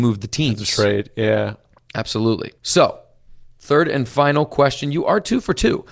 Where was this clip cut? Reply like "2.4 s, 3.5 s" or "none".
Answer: 2.6 s